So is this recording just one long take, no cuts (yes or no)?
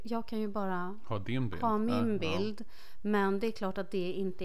yes